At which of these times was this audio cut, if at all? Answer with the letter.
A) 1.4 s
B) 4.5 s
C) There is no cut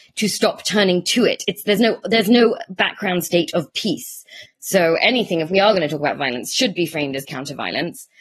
B